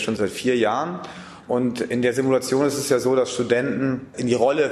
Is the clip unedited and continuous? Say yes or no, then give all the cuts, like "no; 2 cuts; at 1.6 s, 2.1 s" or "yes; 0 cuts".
no; 1 cut; at 1.4 s